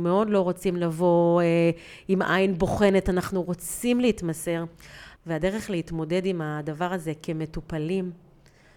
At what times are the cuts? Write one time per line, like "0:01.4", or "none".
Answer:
0:05.2